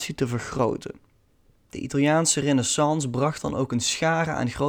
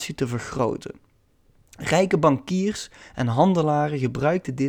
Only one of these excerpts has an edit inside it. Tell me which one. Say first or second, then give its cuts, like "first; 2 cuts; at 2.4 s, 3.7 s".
first; 1 cut; at 1.5 s